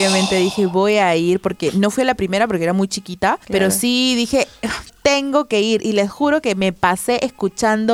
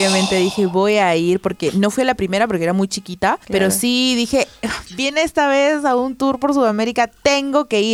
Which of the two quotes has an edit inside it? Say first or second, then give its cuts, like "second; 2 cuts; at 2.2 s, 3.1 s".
first; 1 cut; at 4.9 s